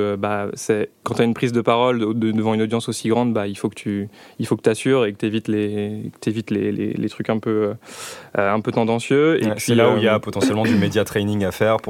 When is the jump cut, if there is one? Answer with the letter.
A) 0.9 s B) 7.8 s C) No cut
C